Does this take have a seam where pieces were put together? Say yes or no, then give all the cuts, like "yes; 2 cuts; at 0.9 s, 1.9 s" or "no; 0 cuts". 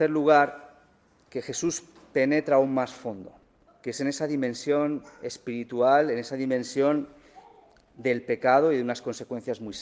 yes; 1 cut; at 3.7 s